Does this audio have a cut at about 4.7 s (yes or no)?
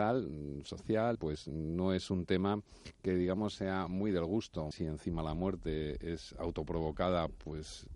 yes